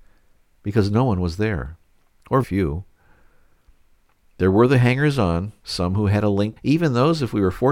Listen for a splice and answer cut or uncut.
cut